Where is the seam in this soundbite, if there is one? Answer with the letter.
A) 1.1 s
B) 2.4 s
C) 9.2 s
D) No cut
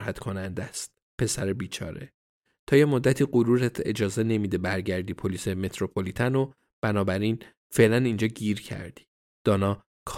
C